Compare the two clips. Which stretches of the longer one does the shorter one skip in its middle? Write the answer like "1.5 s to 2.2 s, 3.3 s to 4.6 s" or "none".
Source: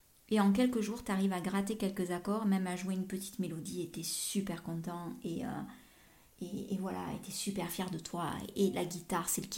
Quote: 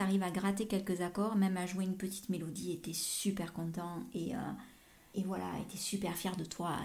6.2 s to 6.7 s